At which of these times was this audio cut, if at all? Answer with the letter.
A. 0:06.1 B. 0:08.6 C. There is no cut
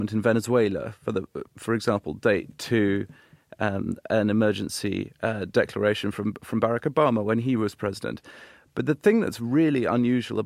C